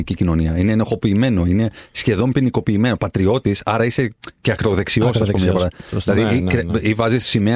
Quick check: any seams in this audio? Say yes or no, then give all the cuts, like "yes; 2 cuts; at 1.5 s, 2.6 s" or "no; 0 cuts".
no; 0 cuts